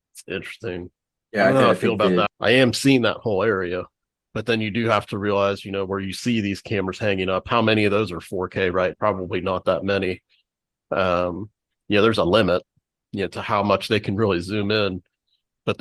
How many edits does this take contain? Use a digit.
2